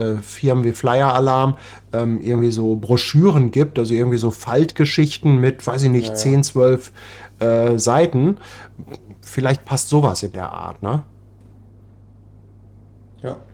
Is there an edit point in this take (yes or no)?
no